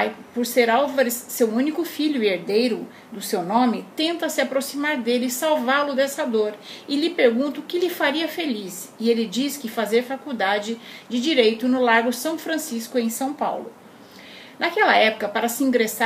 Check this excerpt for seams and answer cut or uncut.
cut